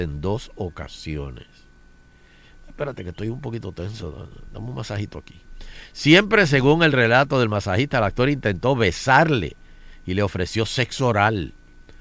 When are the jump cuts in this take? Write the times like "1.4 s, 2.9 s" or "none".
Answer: none